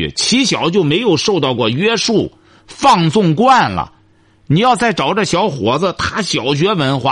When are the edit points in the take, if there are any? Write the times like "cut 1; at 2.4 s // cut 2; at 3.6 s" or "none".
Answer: none